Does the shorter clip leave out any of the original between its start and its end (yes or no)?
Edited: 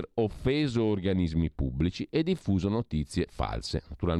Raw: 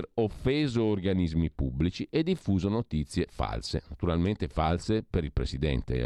no